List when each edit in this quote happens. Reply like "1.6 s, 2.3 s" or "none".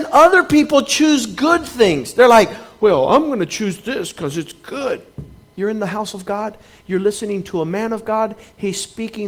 5.5 s